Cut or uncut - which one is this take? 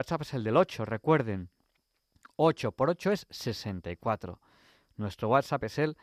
uncut